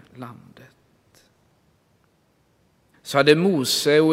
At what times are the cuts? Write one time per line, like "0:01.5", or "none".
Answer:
0:02.9